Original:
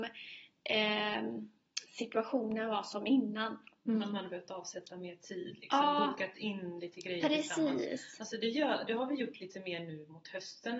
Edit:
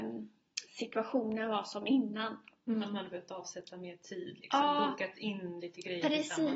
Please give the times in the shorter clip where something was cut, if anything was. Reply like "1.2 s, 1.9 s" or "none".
none